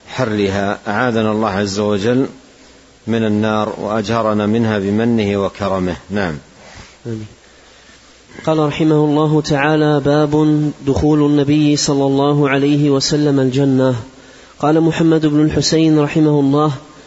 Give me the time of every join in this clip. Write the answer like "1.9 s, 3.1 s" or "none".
7.0 s